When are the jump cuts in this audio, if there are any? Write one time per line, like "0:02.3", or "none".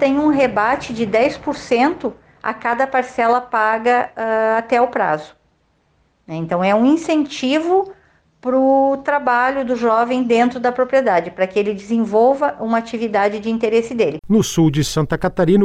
0:14.2

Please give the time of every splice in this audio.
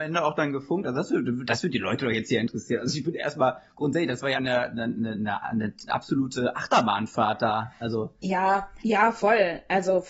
0:04.3
0:08.8

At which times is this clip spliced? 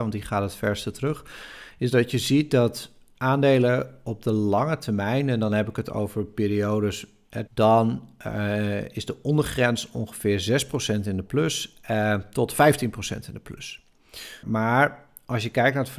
0:07.5
0:14.4

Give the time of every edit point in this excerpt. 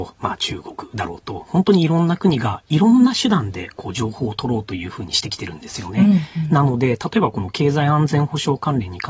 none

